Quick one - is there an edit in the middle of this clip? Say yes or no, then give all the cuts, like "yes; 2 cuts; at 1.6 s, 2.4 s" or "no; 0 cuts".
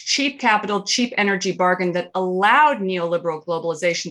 no; 0 cuts